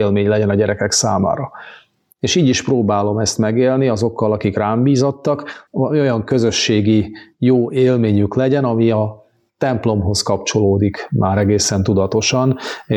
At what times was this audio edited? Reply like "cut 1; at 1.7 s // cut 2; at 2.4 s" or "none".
cut 1; at 5.7 s